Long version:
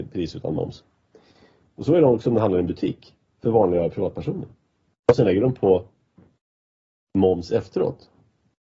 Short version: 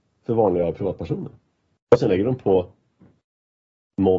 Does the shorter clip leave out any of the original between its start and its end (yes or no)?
no